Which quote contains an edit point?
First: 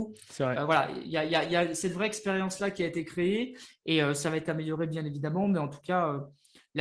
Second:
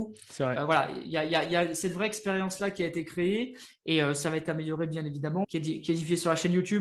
second; 1 cut; at 5.4 s

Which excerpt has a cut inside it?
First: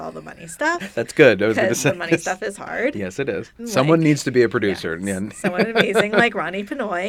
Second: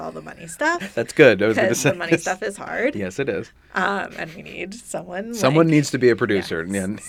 first; 1 cut; at 3.6 s

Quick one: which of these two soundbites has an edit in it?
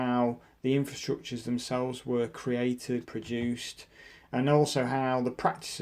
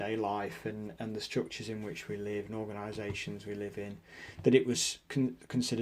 first; 1 cut; at 3.1 s

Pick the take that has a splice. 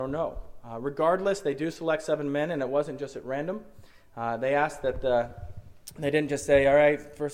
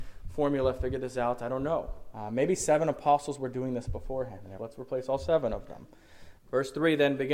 second; 3 cuts; at 2.1 s, 4.6 s, 6.4 s

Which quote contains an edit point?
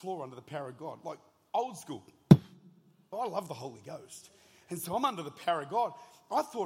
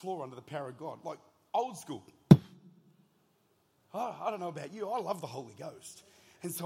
first; 1 cut; at 3.1 s

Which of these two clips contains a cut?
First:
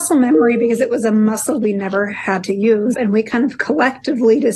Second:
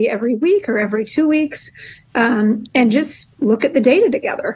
first; 1 cut; at 2.9 s

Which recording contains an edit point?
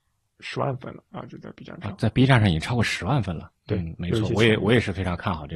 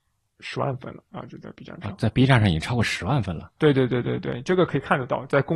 first; 1 cut; at 3.5 s

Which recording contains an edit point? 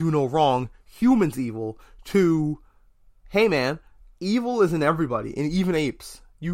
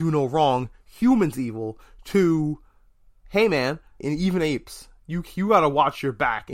second; 1 cut; at 4.0 s

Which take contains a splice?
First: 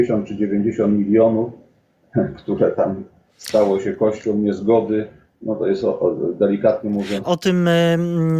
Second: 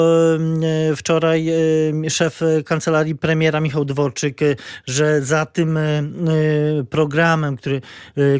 first; 1 cut; at 7.2 s

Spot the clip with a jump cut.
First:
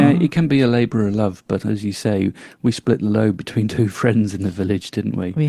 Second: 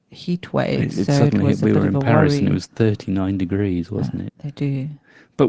second; 1 cut; at 4.3 s

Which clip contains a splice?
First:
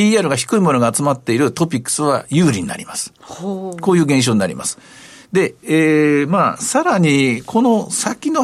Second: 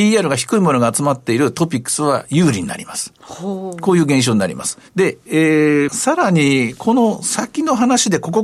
second; 2 cuts; at 4.9 s, 5.9 s

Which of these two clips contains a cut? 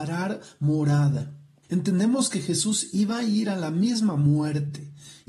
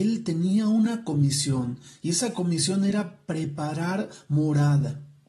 first; 1 cut; at 1.6 s

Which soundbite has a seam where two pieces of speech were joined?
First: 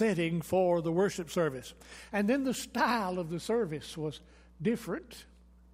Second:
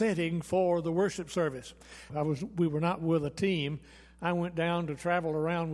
second; 1 cut; at 2.1 s

